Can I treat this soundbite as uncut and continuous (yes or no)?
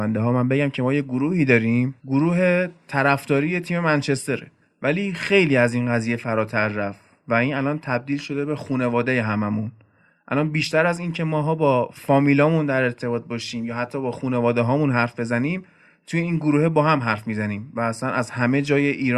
no